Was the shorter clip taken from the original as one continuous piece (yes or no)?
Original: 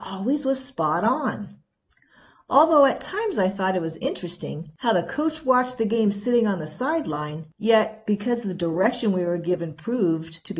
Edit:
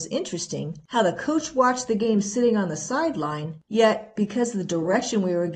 yes